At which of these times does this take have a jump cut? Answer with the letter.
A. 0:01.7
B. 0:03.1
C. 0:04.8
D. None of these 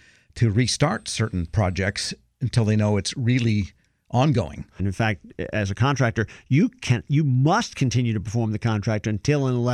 C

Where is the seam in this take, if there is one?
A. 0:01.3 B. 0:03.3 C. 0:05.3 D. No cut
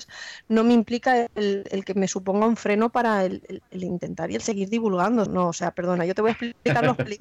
C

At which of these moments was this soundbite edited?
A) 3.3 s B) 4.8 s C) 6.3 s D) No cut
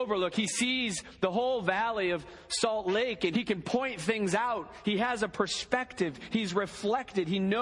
A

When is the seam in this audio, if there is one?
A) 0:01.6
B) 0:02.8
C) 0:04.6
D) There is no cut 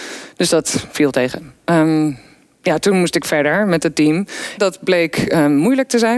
C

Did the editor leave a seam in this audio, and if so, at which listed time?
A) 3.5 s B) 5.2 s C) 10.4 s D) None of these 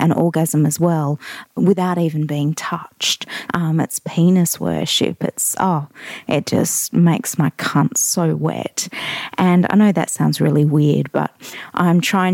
A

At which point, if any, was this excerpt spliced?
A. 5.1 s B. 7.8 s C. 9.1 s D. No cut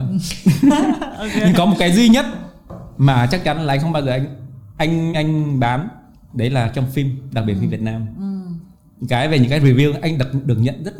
A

